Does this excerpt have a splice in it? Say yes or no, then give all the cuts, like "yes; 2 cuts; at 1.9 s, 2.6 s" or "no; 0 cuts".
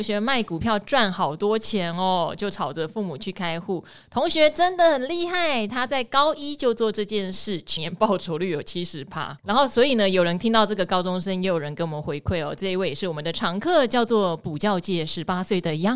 yes; 2 cuts; at 7.8 s, 9.4 s